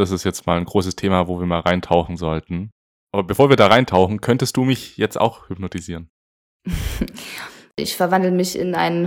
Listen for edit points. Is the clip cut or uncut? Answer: cut